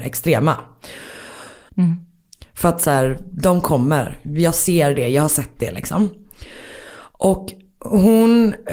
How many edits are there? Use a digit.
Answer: 1